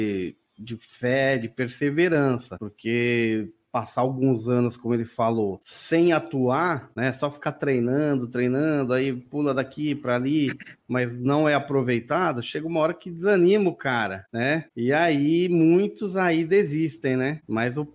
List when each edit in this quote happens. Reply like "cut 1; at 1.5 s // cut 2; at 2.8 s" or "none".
none